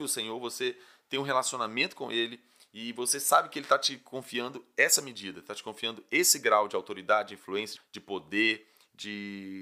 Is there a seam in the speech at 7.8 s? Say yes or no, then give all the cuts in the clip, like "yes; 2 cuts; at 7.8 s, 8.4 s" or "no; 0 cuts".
yes; 1 cut; at 7.8 s